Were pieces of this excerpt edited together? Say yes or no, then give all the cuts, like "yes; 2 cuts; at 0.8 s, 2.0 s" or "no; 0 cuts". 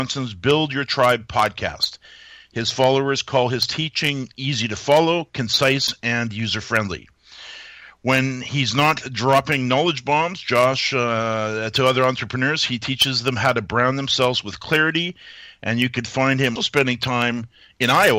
yes; 1 cut; at 16.6 s